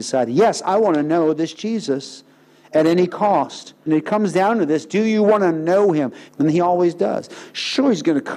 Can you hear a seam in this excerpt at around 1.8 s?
no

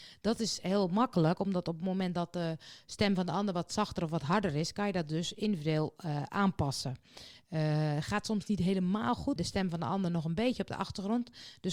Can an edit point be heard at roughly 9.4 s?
yes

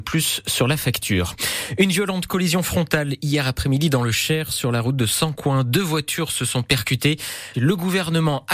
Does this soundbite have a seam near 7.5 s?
yes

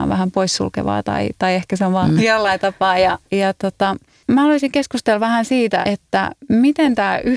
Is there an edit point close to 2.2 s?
yes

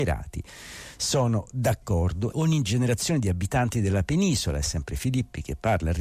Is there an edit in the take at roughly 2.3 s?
yes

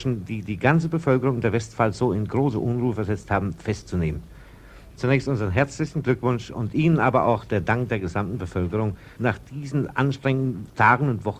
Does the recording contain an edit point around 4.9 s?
yes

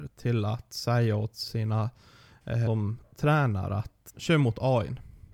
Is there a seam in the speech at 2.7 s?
yes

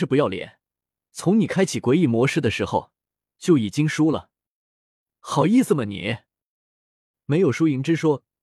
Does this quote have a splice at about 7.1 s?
yes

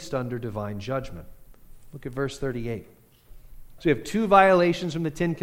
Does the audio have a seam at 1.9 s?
no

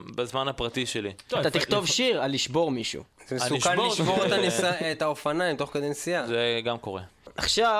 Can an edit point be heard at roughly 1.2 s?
no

